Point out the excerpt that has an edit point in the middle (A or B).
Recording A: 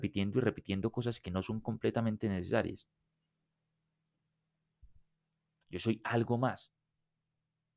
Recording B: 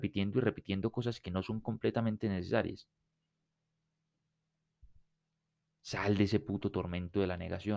A